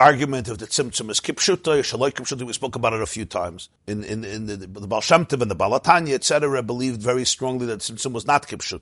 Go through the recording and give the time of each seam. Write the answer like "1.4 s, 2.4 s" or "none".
3.8 s